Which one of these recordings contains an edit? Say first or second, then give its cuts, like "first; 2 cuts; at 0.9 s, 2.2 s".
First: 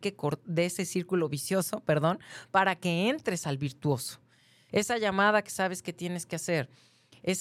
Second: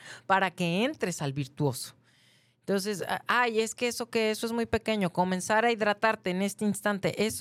first; 1 cut; at 4.7 s